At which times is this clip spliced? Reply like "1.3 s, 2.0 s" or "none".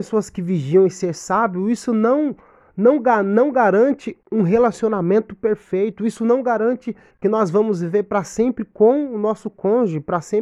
4.2 s